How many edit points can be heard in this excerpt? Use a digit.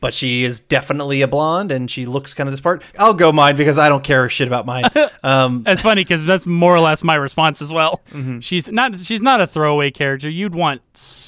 2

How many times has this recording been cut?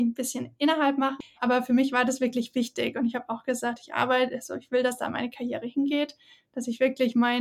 1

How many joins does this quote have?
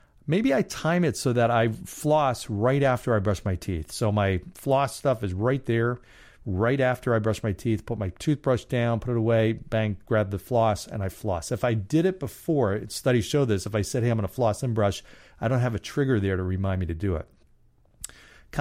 0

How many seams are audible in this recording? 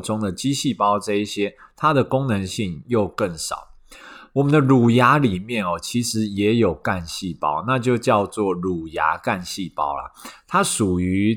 0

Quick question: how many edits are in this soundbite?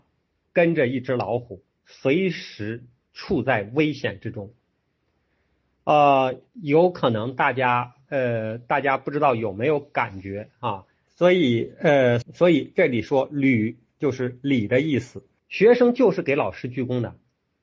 3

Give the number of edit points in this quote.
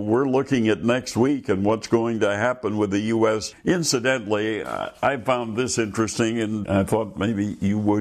2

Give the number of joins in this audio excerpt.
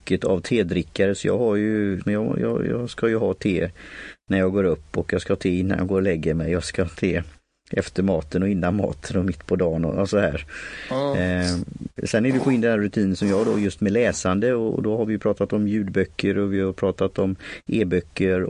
1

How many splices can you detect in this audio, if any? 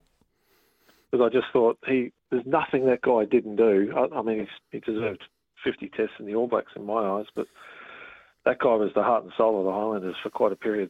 1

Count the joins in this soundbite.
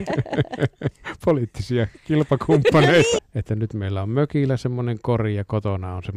1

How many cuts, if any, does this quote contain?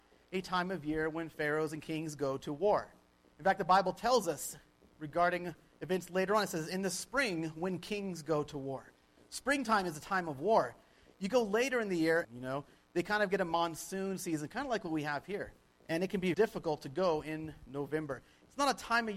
2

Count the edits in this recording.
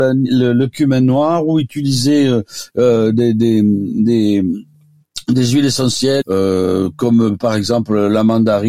1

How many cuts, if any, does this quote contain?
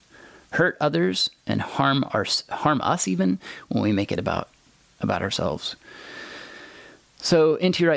0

